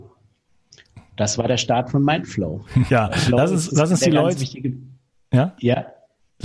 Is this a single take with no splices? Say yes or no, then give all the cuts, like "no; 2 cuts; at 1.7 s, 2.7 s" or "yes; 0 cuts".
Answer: no; 1 cut; at 2.9 s